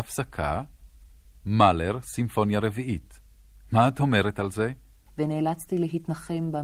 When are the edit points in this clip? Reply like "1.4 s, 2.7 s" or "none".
5.1 s